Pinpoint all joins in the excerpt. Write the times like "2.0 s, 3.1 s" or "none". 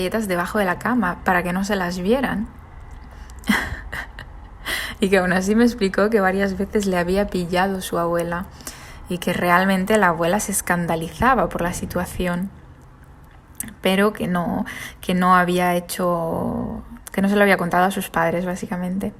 none